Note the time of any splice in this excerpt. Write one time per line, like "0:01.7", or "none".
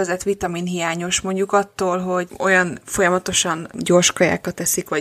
none